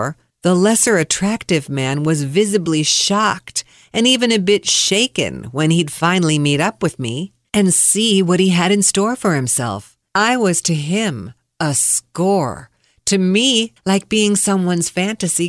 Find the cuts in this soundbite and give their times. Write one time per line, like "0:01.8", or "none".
0:13.8